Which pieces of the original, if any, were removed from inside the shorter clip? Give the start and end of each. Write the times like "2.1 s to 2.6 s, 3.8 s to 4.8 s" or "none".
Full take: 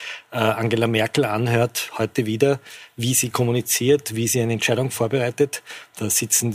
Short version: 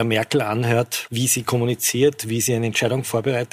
1.9 s to 2.9 s